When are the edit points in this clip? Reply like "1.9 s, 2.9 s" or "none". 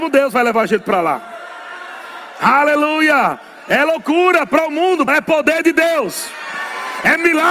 5.1 s